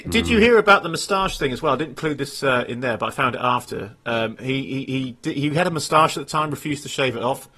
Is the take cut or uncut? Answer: uncut